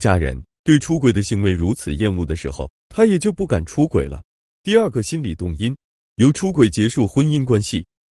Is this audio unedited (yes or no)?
yes